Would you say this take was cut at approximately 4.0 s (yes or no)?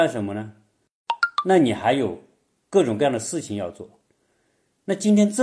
no